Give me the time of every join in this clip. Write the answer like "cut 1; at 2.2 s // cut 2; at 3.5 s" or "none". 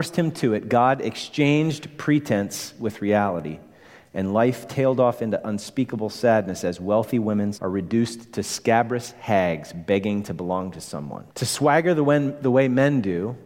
cut 1; at 7.5 s // cut 2; at 11.3 s